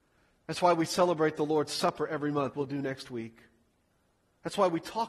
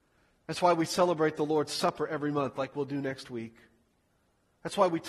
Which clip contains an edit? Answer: first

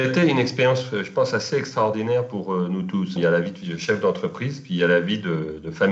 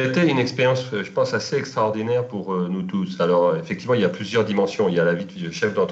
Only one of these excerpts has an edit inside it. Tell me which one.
first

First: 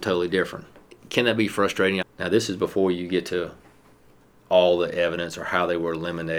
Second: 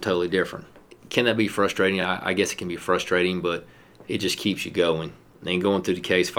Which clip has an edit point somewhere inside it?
first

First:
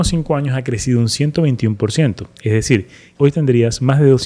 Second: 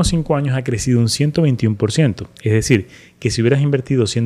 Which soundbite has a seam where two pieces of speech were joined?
first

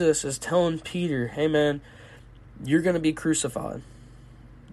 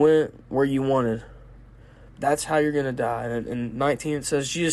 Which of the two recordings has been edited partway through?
second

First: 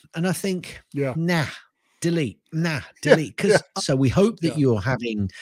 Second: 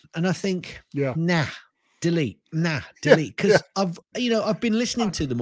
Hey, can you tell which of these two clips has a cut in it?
first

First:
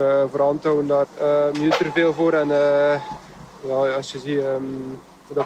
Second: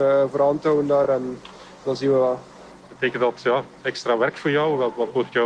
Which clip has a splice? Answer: first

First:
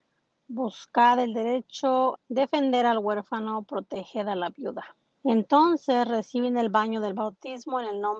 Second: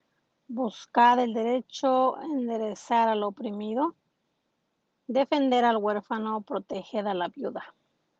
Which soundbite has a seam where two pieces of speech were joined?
first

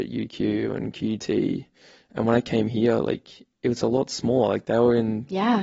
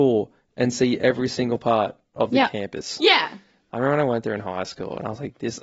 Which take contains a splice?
second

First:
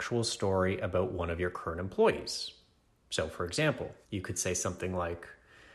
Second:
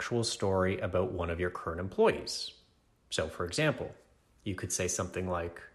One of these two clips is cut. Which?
first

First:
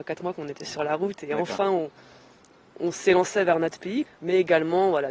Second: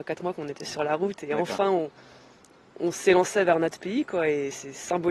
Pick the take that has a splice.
first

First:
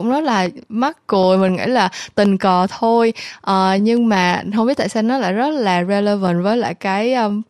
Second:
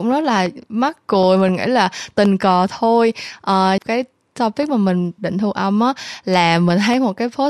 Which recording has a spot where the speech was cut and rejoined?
second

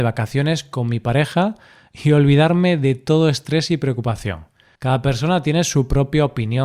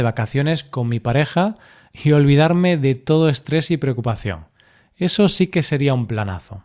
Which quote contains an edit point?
first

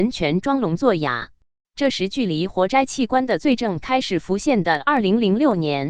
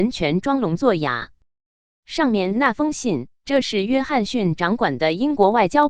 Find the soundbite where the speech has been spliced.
first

